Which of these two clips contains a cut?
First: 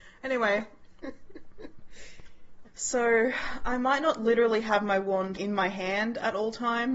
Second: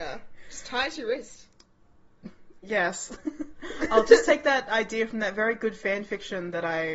first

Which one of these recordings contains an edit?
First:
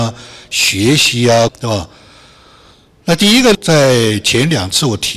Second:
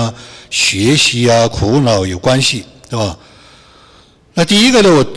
first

